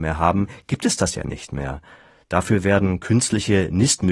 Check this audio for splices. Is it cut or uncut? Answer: uncut